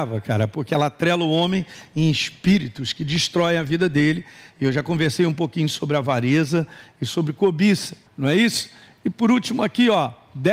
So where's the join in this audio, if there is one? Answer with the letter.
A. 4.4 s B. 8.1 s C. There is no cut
B